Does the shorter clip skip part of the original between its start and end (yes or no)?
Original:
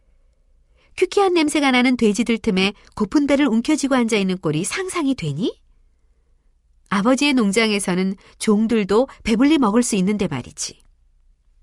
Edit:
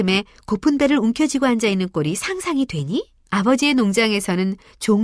yes